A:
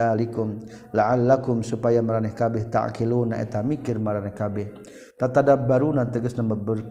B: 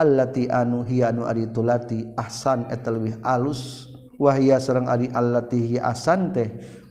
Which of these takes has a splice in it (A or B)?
B